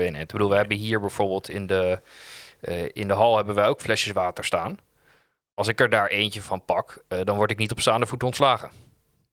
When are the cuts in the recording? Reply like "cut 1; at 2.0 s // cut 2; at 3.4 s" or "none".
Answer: none